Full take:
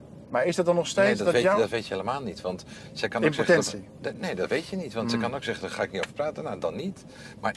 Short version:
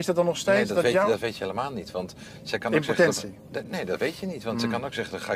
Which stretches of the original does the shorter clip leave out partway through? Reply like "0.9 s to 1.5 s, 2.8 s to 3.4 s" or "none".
none